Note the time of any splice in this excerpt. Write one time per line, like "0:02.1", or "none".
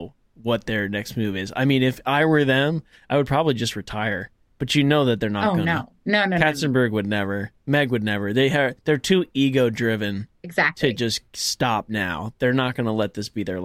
none

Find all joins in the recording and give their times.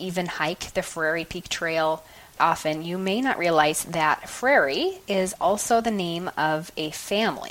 0:02.4

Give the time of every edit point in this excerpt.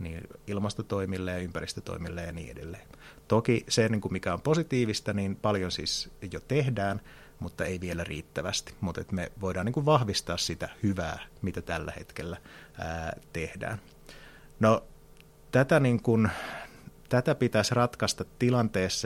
none

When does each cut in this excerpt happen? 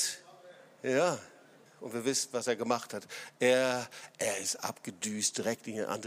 0:01.7

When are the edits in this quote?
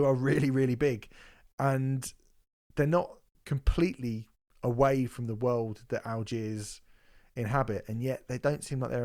none

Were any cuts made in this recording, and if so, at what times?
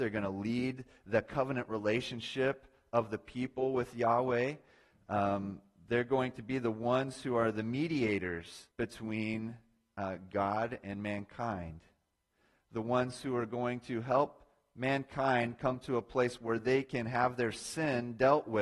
0:08.7

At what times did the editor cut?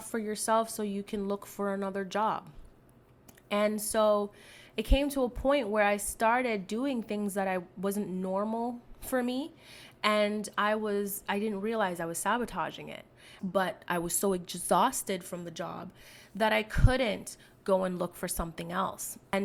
0:13.4

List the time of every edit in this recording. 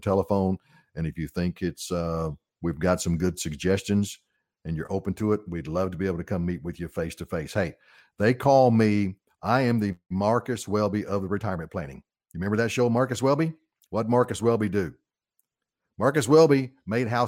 none

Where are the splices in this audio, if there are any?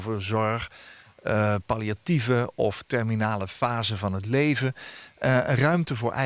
none

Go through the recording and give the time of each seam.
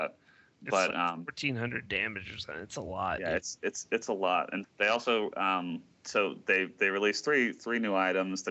0:04.6

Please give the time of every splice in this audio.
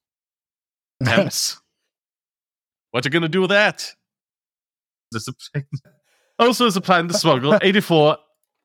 0:01.0
0:05.1

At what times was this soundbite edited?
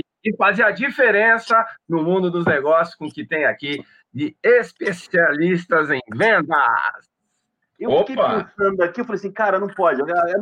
0:07.6

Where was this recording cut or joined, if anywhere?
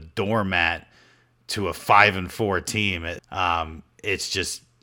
0:03.2

